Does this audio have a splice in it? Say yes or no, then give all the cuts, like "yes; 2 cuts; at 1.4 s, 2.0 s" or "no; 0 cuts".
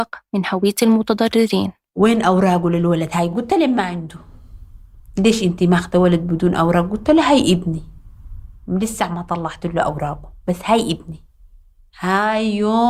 no; 0 cuts